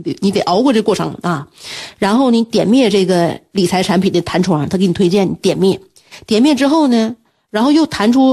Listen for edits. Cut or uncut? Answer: uncut